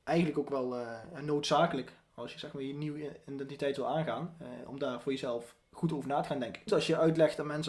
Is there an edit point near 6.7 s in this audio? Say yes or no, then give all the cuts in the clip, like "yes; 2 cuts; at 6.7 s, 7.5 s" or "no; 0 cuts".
yes; 1 cut; at 6.7 s